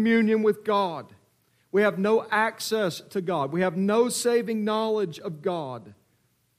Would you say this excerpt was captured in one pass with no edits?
yes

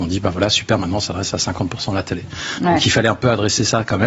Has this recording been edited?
no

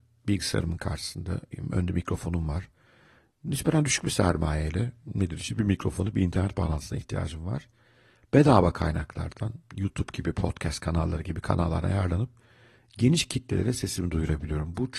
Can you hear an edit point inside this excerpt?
no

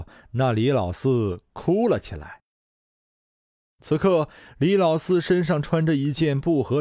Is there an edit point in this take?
no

